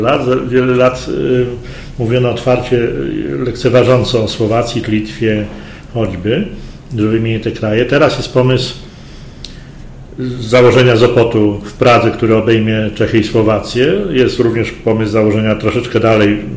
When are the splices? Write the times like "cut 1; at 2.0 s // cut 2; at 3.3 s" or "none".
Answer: cut 1; at 4.8 s